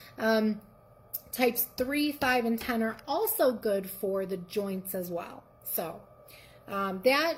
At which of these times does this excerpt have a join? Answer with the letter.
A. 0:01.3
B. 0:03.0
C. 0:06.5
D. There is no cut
D